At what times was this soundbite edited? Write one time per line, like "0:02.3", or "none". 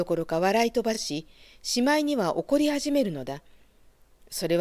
none